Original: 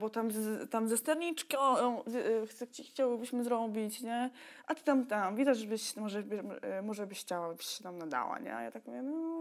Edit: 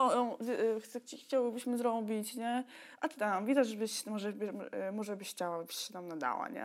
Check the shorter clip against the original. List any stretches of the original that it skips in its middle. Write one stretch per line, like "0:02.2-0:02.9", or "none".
0:04.8-0:05.1